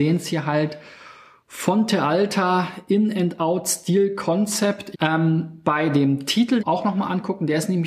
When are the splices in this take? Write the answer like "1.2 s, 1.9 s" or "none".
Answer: 4.9 s, 6.6 s